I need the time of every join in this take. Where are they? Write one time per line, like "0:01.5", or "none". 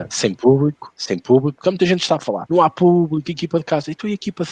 0:00.9
0:02.5